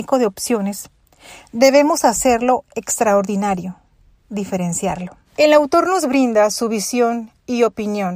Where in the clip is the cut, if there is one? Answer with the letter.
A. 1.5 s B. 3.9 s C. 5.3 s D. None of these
C